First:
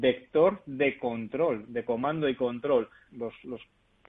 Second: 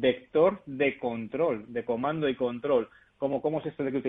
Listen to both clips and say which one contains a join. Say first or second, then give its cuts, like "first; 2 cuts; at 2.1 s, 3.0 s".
first; 1 cut; at 3.1 s